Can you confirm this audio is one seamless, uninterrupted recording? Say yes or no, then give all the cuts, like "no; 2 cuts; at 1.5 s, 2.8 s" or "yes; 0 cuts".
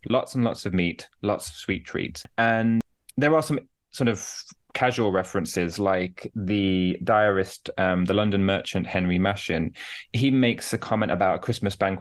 yes; 0 cuts